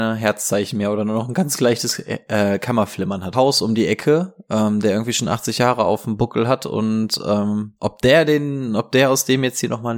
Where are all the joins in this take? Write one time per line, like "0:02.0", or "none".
0:03.3
0:07.8